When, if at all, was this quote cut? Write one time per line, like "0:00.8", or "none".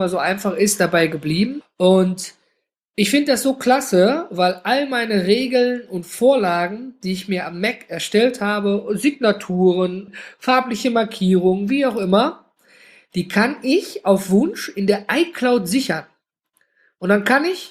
0:01.6
0:10.1